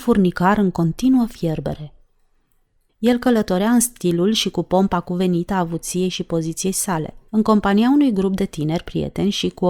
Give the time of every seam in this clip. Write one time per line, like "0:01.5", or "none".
0:02.9
0:07.3